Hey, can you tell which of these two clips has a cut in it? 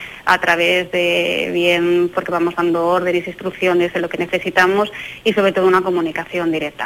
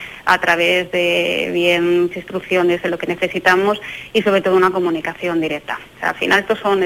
second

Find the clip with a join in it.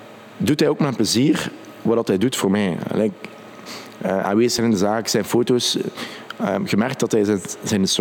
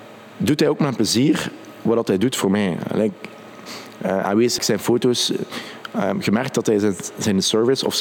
second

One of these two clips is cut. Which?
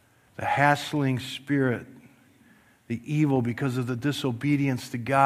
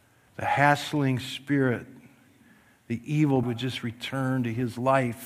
second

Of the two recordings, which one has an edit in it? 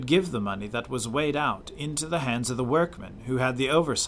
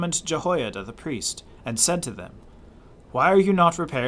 second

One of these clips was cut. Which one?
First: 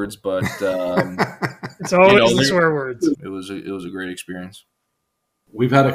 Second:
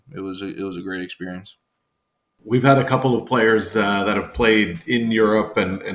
first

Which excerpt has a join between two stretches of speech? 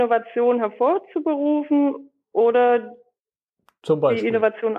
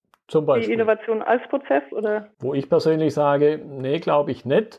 second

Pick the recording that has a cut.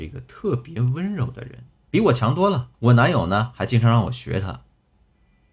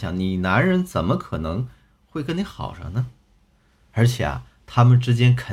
first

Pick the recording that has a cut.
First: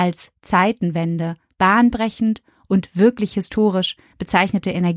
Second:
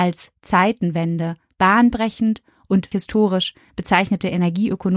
second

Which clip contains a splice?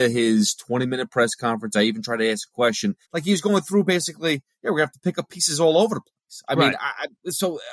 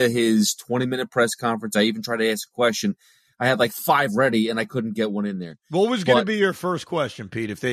first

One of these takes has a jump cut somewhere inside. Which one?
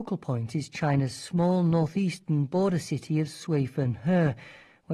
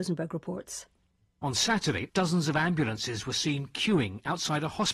second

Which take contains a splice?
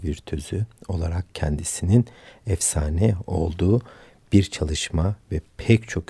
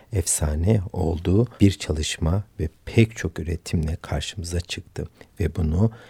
second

